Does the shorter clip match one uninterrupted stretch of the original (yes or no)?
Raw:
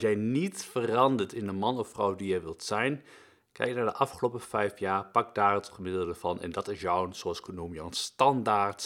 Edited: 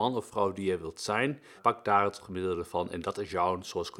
no